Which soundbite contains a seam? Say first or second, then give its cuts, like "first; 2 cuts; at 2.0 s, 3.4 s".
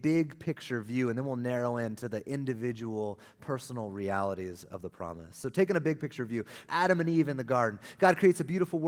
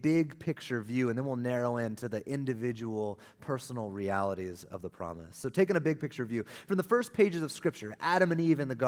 first; 1 cut; at 6.6 s